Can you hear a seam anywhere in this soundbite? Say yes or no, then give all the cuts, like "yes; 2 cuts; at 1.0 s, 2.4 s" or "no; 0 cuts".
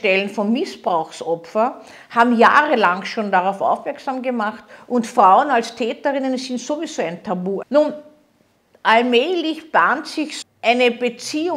yes; 2 cuts; at 7.6 s, 10.4 s